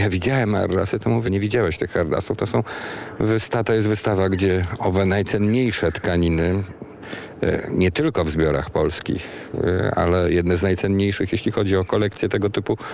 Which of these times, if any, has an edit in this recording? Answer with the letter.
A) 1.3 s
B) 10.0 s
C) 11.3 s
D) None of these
A